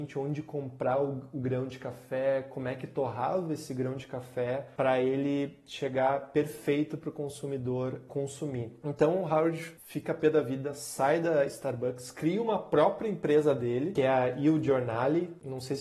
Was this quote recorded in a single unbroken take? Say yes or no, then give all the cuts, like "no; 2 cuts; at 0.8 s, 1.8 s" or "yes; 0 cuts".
yes; 0 cuts